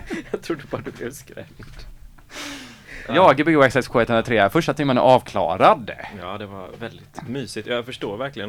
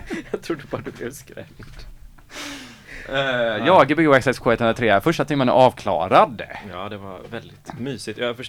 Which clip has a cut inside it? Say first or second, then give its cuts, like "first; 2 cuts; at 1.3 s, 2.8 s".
first; 1 cut; at 3.1 s